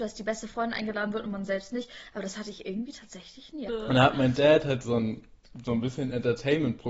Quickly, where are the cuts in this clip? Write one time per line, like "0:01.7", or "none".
0:03.7
0:04.8

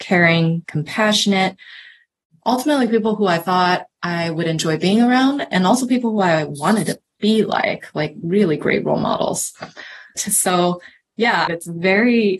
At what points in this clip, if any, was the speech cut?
0:10.2
0:11.5

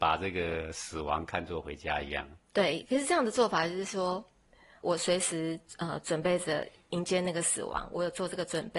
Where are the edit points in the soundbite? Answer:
0:02.4
0:04.8

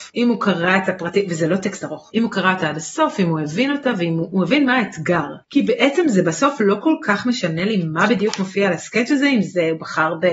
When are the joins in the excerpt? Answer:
none

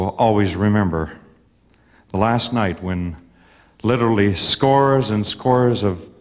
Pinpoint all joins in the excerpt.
none

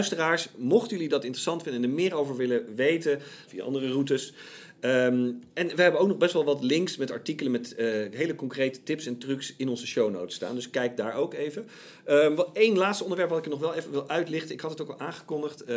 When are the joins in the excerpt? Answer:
0:03.5

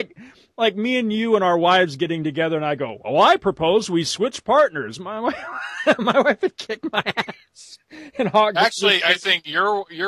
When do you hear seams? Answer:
none

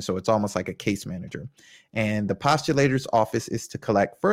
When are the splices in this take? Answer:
none

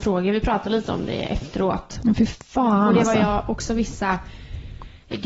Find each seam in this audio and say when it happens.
none

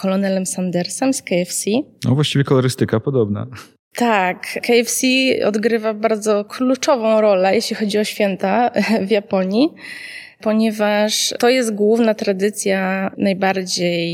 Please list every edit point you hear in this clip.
none

